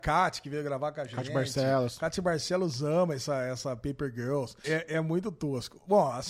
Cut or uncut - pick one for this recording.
cut